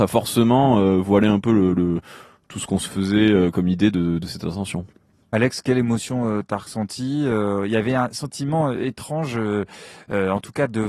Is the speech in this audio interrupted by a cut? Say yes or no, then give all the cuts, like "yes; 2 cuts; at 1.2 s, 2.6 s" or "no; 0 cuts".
no; 0 cuts